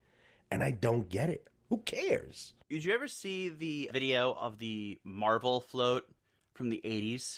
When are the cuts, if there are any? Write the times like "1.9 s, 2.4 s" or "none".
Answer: 1.5 s, 2.6 s, 3.9 s